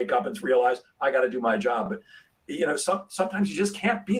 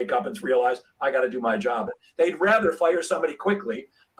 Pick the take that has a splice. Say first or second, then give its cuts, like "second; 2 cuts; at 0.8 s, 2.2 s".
second; 1 cut; at 1.9 s